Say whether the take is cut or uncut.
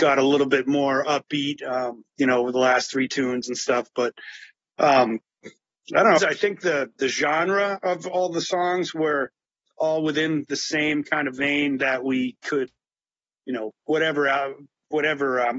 cut